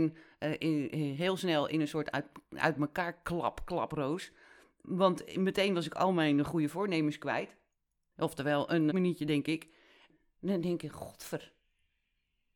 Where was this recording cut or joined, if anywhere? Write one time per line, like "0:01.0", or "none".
0:08.9